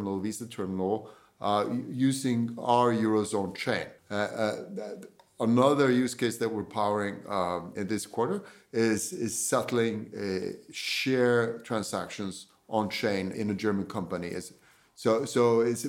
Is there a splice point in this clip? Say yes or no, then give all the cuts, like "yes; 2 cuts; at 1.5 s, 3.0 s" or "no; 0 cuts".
yes; 3 cuts; at 4.0 s, 7.8 s, 13.3 s